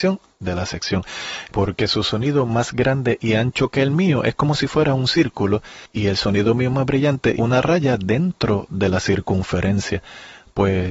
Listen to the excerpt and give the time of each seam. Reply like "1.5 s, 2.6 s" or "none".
1.5 s, 7.4 s